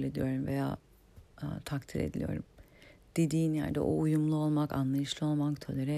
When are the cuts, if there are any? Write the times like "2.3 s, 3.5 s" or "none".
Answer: none